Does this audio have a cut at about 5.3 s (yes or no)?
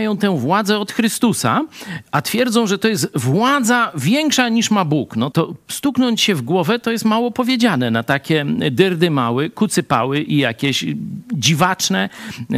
yes